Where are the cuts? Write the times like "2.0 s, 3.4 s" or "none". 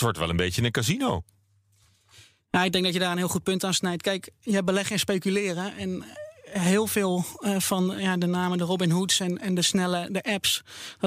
none